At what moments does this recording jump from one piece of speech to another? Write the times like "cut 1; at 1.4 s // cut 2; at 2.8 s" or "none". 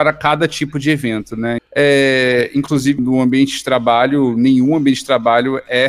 cut 1; at 1.6 s // cut 2; at 3.0 s

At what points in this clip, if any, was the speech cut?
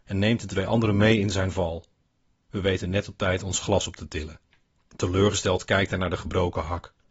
cut 1; at 4.8 s

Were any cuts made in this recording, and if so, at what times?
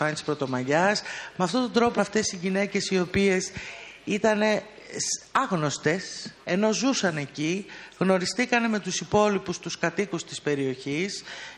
cut 1; at 2.0 s // cut 2; at 6.4 s

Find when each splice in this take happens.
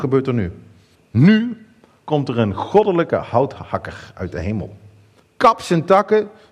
cut 1; at 0.9 s // cut 2; at 5.2 s

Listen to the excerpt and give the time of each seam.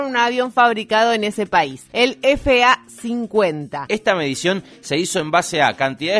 cut 1; at 3.9 s

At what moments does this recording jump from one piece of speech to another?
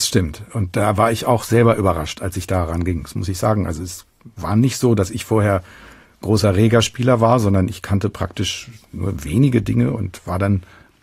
none

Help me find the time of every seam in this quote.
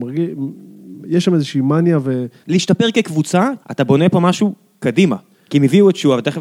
cut 1; at 2.4 s // cut 2; at 3.6 s

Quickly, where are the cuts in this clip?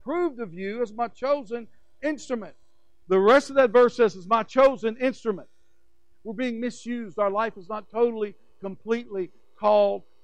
cut 1; at 3.0 s // cut 2; at 6.1 s

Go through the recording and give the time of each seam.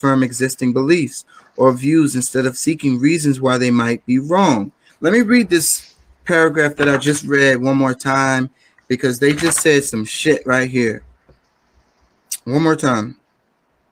cut 1; at 4.9 s

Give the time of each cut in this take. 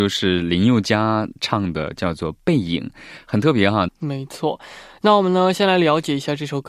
cut 1; at 3.9 s

